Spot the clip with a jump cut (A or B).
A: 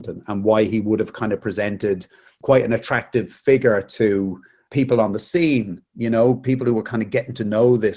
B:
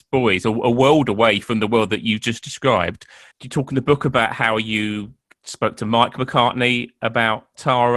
B